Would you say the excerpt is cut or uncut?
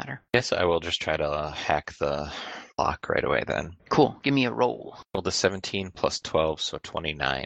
uncut